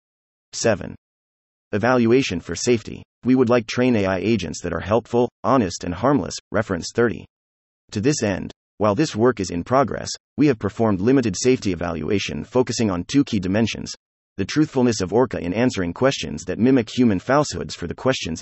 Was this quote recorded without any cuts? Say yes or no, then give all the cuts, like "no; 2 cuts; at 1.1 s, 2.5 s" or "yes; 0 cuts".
yes; 0 cuts